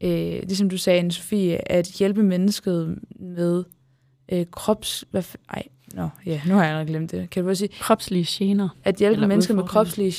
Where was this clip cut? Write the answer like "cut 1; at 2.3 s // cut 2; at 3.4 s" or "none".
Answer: cut 1; at 8.8 s